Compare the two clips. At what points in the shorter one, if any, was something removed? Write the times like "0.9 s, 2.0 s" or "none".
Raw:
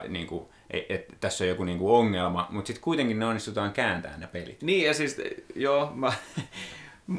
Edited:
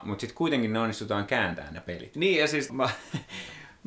2.7 s